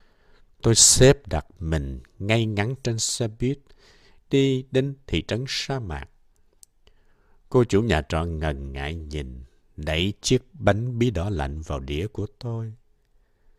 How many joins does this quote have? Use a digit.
0